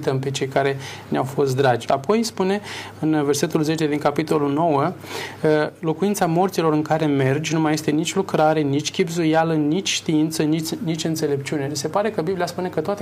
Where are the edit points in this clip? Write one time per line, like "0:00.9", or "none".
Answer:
0:01.9